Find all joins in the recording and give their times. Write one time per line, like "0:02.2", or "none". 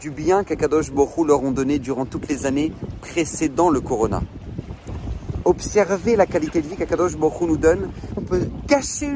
0:05.4
0:08.2